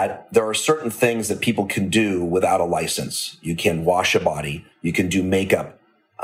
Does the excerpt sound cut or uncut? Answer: cut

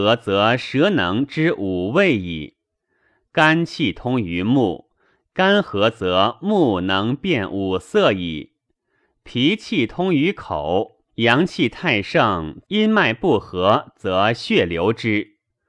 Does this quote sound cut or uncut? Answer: cut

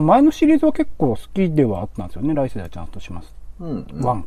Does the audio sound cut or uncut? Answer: uncut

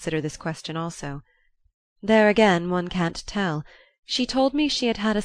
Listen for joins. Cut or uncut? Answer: uncut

